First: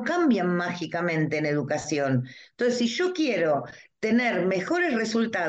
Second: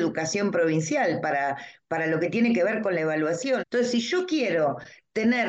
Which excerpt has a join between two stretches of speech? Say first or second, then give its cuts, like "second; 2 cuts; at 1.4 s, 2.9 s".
second; 1 cut; at 3.6 s